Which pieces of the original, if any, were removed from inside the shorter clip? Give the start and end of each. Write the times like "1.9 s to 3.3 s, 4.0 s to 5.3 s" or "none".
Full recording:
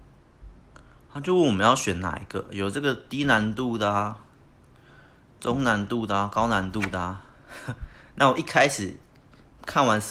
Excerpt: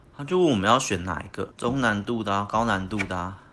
2.5 s to 5.3 s